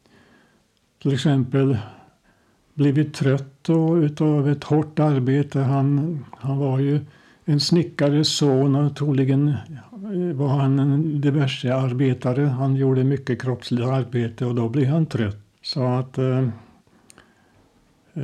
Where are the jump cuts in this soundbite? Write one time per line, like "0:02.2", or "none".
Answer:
0:15.5